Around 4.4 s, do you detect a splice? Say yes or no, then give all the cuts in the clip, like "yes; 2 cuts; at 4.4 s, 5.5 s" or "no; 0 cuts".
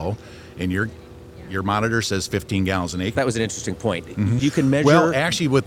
yes; 2 cuts; at 3.2 s, 4.4 s